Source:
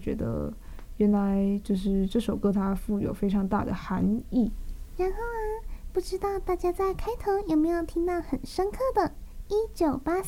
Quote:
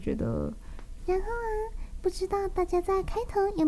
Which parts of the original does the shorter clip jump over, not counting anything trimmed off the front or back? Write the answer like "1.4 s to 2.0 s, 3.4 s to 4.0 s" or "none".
1.0 s to 4.9 s